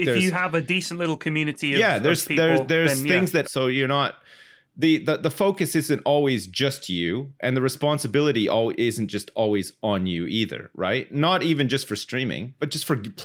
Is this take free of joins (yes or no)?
no